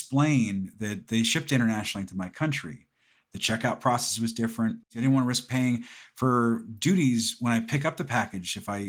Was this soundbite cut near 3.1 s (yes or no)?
no